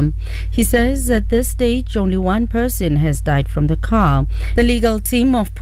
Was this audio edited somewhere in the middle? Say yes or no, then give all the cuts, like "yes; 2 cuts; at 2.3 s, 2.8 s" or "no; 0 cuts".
yes; 1 cut; at 4.6 s